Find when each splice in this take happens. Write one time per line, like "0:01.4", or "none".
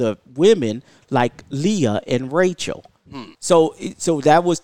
0:03.3